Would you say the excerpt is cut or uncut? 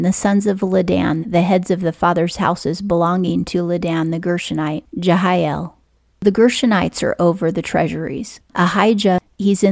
cut